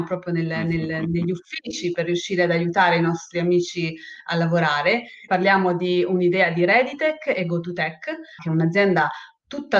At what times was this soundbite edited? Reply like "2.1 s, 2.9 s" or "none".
5.3 s, 8.4 s

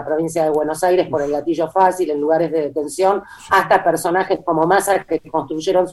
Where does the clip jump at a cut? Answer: 3.5 s

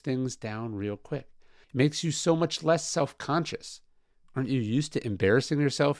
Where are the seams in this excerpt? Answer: 1.6 s

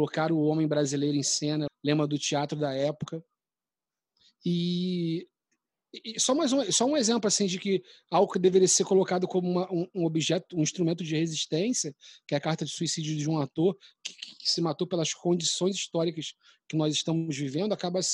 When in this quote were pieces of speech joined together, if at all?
1.7 s

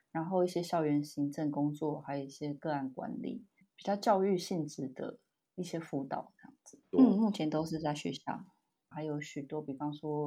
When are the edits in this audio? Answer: 3.6 s, 6.9 s, 8.9 s

